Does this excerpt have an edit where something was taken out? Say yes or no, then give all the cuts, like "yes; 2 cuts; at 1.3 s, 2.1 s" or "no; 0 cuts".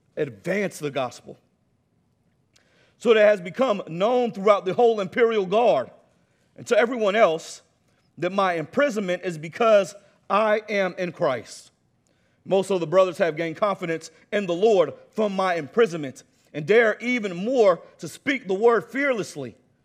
no; 0 cuts